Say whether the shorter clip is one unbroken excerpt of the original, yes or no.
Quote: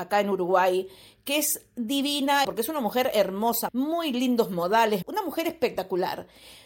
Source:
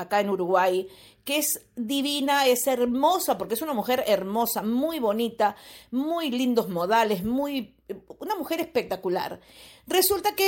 no